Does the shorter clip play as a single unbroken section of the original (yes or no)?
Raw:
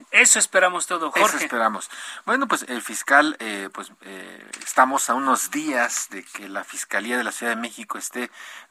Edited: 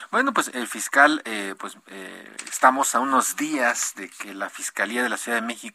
yes